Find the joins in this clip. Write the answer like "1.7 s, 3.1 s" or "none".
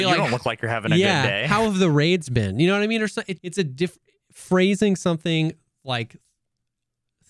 3.4 s